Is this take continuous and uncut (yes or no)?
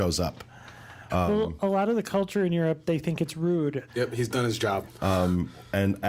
no